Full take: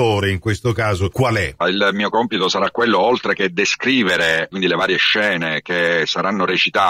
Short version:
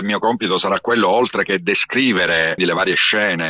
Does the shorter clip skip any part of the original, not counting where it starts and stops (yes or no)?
yes